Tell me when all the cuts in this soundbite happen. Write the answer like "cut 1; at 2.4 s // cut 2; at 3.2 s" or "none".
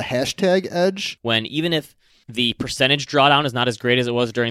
cut 1; at 1.2 s